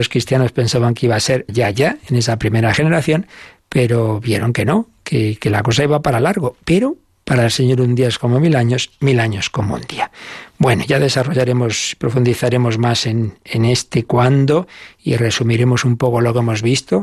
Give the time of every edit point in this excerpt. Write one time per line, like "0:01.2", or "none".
0:01.5